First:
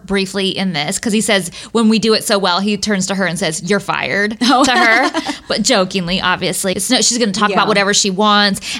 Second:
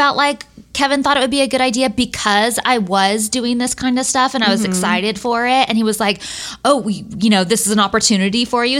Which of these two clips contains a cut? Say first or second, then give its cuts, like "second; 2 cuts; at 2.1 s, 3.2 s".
first; 1 cut; at 6.7 s